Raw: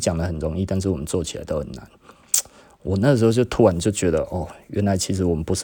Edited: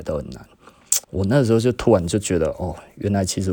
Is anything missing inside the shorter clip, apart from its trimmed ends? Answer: yes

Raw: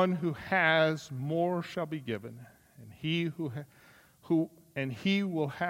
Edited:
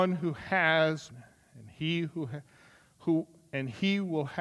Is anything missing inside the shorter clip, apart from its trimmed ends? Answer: yes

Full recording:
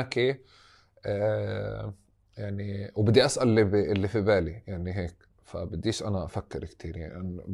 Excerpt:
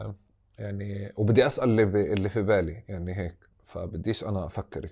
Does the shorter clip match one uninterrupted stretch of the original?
yes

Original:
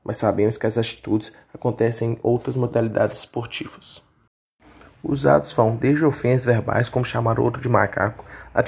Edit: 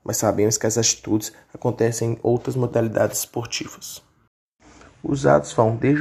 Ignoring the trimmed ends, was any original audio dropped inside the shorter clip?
no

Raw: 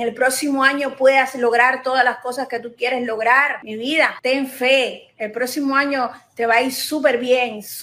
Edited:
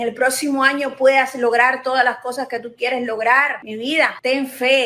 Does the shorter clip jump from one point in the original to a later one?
no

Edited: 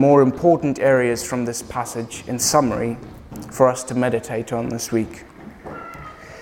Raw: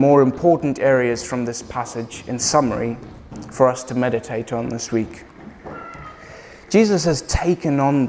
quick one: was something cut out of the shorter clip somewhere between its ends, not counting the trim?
no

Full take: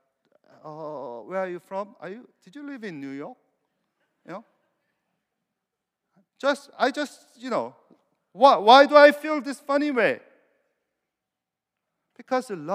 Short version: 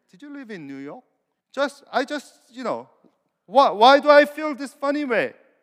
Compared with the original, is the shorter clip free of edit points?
no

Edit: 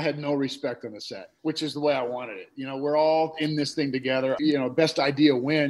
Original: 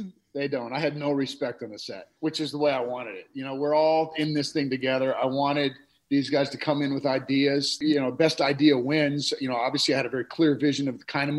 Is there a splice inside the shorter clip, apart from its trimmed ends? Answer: yes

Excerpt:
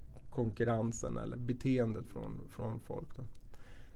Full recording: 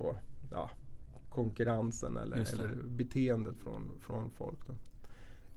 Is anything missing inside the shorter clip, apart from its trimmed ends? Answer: yes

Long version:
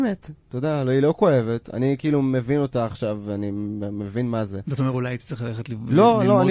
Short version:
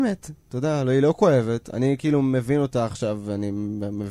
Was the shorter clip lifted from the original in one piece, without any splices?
yes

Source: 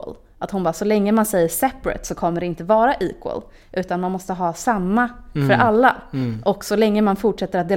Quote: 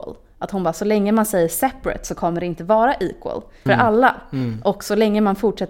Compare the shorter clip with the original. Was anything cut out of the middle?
yes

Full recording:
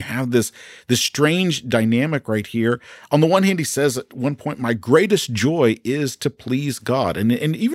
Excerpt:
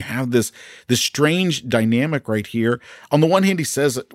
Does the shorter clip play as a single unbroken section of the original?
yes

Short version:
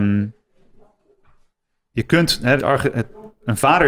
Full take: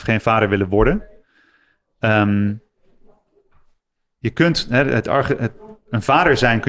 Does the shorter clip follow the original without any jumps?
no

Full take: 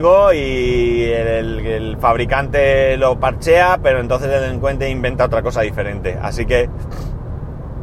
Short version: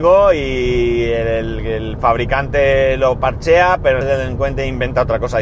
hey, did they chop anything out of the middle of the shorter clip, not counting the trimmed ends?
yes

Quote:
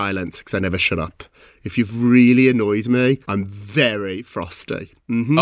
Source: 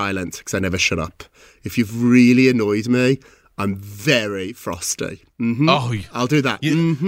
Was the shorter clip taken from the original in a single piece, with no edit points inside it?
no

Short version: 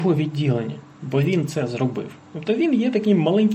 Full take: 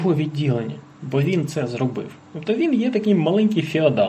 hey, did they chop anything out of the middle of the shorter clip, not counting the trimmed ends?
no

